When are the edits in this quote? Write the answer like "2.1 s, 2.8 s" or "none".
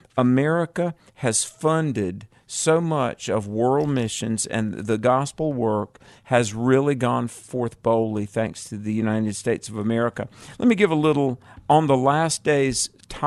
none